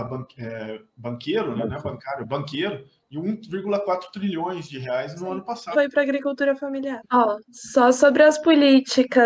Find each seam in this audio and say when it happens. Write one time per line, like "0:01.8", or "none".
0:05.7
0:07.0